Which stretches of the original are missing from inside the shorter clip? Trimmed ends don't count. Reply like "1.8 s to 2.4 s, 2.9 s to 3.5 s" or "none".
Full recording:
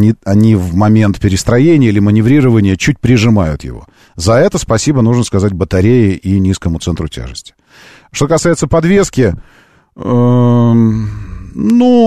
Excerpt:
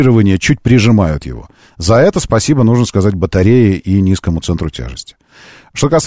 none